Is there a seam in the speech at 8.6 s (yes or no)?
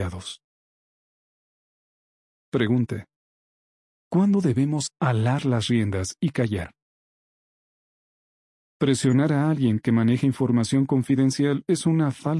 yes